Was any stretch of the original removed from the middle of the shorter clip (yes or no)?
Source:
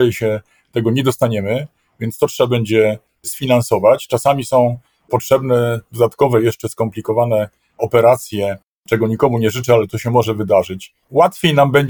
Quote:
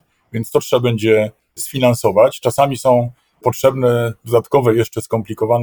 no